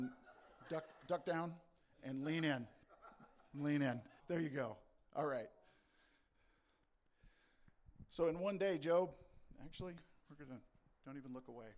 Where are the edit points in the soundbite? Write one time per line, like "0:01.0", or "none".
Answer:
0:04.2